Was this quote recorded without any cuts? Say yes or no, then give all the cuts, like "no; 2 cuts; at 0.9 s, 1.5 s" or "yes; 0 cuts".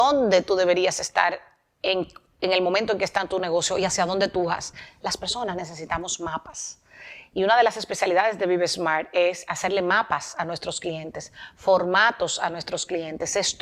yes; 0 cuts